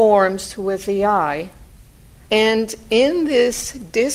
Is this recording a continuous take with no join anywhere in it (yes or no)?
no